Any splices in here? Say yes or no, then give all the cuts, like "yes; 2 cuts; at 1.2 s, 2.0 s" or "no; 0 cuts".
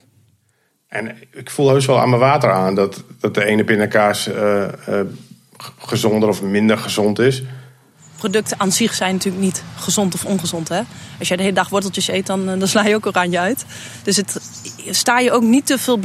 no; 0 cuts